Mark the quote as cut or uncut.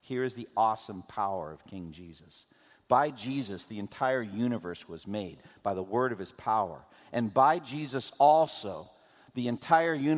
uncut